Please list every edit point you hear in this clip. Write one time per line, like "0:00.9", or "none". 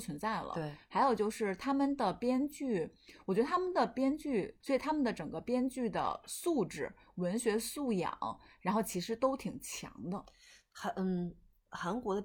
0:04.6